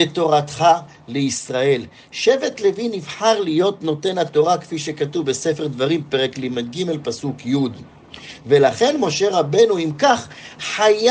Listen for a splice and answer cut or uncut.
uncut